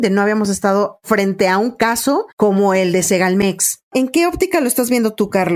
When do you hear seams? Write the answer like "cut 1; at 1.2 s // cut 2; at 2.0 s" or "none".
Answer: cut 1; at 2.3 s